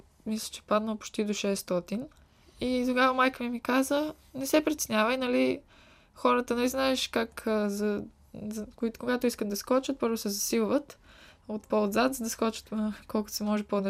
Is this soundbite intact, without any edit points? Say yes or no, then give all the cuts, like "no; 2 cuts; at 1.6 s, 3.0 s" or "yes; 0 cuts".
yes; 0 cuts